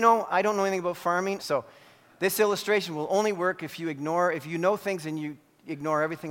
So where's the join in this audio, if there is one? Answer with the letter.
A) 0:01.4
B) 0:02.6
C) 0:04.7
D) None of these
A